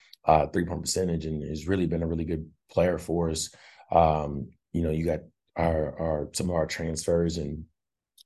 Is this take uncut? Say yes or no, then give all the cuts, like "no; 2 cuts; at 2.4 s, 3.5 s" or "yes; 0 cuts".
yes; 0 cuts